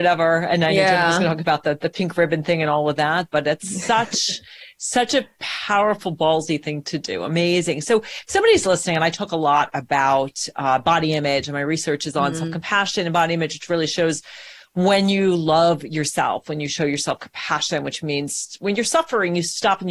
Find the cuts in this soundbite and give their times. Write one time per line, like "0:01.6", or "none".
none